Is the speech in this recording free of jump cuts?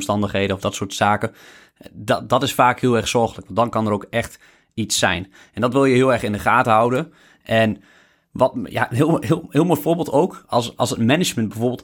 yes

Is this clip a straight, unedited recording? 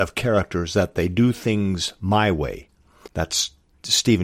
no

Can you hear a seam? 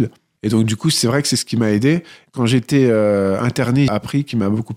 yes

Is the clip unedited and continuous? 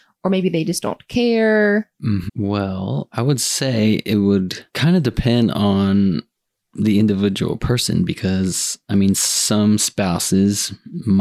no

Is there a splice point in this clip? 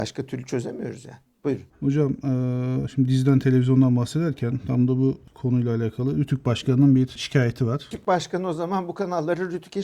yes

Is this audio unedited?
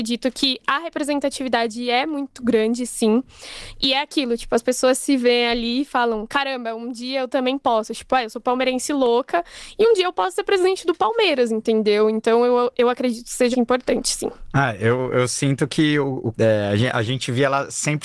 no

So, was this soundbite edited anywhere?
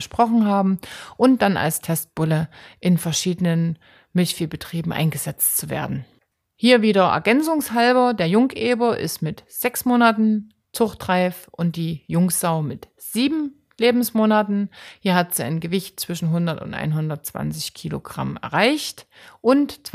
no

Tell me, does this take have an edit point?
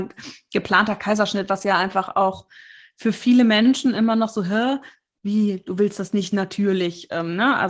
no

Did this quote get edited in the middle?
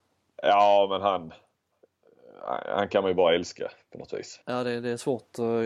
yes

